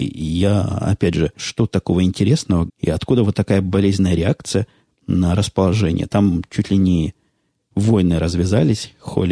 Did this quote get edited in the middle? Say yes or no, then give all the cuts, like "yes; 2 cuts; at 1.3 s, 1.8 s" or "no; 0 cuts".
yes; 2 cuts; at 1.4 s, 2.7 s